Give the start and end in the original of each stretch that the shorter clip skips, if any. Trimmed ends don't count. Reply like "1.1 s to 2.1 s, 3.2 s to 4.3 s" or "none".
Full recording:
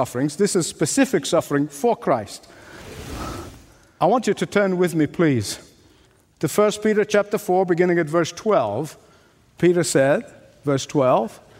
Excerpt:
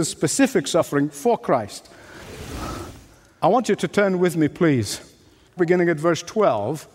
6.1 s to 7.7 s